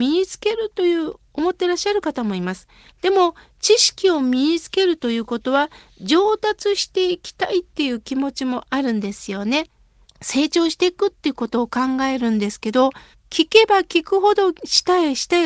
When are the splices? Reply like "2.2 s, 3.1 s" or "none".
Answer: 2.9 s, 10.0 s, 13.1 s

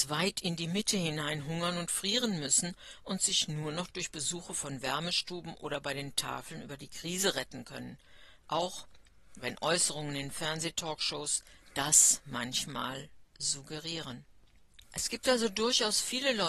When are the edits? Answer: 14.8 s

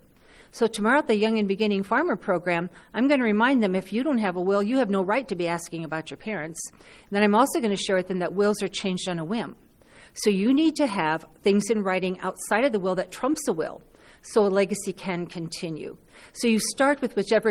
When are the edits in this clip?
none

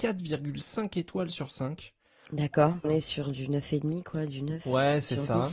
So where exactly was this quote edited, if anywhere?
2.8 s

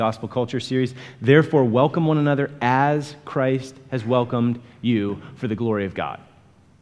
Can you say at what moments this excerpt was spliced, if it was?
none

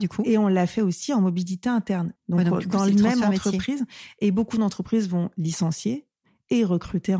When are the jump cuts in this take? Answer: 2.2 s

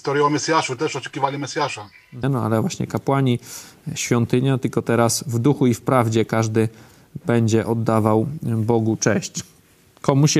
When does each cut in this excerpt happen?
2.2 s

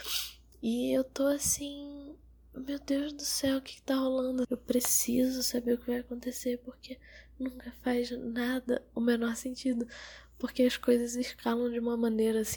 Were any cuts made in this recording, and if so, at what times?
4.4 s

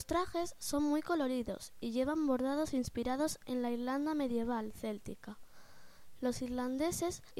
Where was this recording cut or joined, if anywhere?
6.2 s

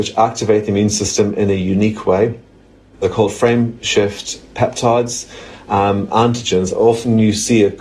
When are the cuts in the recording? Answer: 6.1 s

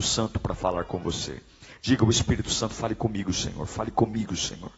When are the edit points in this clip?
none

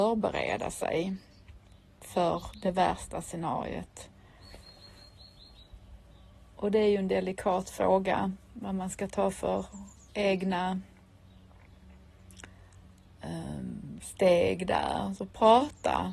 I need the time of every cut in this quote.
none

